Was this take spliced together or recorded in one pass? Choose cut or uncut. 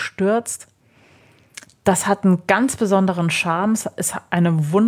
uncut